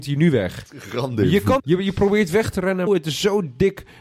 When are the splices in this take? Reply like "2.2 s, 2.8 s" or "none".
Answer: 1.6 s, 2.9 s